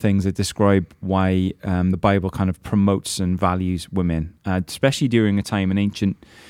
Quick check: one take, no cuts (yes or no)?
yes